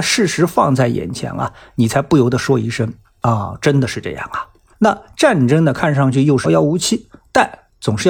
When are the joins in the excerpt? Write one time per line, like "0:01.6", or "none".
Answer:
0:04.7
0:06.4